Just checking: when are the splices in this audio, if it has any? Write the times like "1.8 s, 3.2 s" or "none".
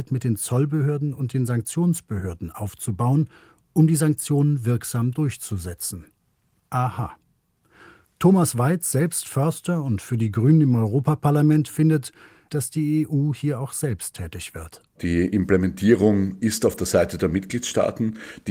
12.5 s